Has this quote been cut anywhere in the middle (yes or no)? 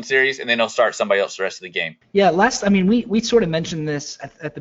yes